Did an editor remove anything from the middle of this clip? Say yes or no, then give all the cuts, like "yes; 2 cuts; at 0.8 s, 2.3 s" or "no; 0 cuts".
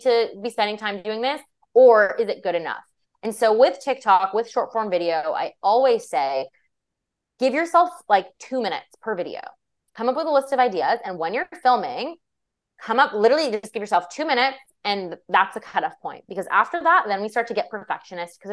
no; 0 cuts